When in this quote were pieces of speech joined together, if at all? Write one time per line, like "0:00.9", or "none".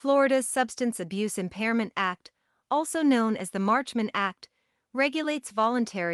none